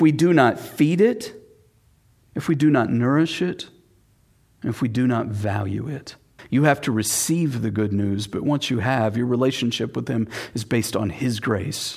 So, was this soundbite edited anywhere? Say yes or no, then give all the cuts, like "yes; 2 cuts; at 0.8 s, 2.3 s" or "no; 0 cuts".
yes; 1 cut; at 6.4 s